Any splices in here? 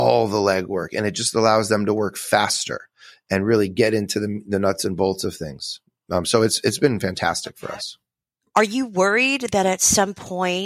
no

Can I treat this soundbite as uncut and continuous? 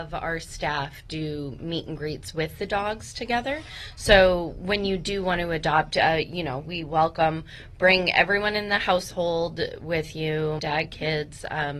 no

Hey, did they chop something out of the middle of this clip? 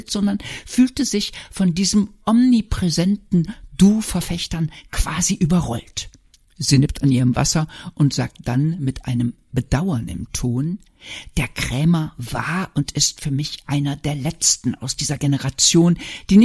no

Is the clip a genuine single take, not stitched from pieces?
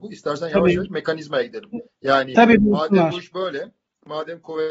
yes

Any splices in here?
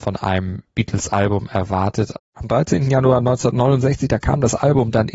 yes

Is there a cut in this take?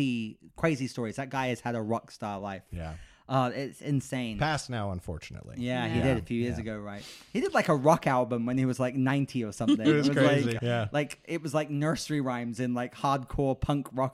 yes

